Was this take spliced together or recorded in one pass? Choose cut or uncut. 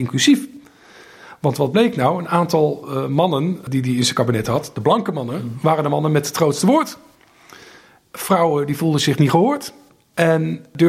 uncut